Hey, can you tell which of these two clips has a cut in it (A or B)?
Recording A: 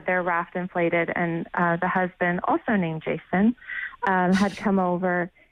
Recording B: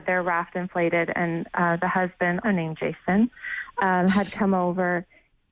B